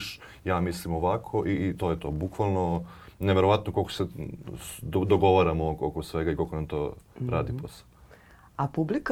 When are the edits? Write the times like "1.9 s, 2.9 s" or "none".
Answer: none